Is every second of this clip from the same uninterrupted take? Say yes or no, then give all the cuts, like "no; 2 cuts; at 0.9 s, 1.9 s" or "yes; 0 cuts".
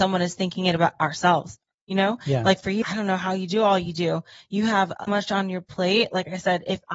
no; 2 cuts; at 2.8 s, 5.1 s